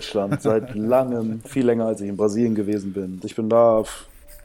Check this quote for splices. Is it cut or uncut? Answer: cut